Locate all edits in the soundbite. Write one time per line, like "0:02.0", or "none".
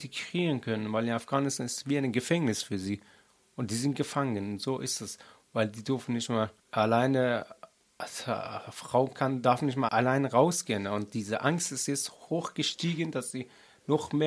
0:06.6
0:09.9
0:12.3